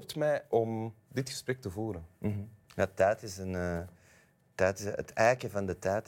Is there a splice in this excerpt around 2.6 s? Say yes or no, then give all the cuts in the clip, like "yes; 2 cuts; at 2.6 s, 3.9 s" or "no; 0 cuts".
yes; 1 cut; at 2.6 s